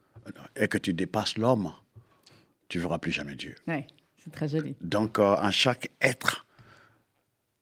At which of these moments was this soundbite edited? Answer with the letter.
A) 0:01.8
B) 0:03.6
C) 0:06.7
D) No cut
B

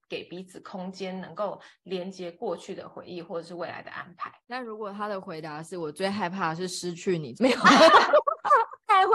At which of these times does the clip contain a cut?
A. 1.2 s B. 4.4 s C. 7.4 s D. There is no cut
C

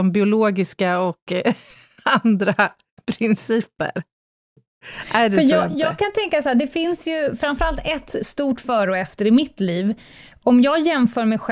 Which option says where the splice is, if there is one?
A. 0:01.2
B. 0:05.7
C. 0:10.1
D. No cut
D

